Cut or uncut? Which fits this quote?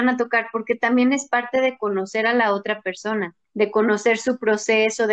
cut